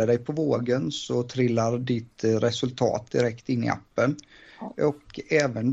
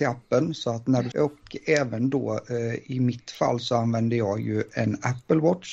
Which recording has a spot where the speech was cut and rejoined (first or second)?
second